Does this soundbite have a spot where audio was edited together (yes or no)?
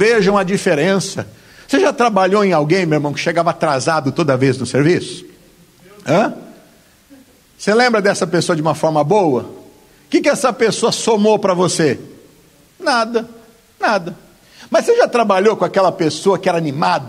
no